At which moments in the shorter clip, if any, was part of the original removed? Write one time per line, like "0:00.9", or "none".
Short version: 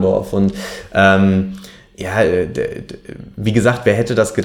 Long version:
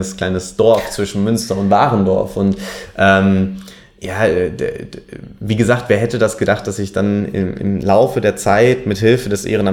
none